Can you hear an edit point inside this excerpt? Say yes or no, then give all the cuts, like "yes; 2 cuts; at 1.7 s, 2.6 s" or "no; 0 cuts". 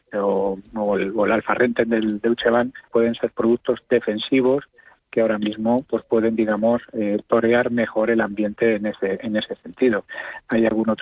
yes; 1 cut; at 2.9 s